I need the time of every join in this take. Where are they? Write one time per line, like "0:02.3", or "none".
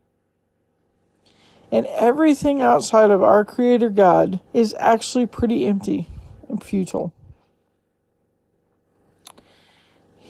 0:01.6
0:04.5
0:06.6